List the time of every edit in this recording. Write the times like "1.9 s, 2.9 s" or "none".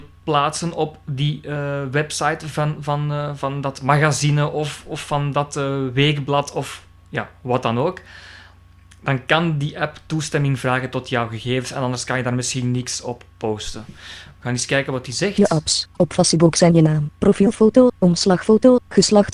none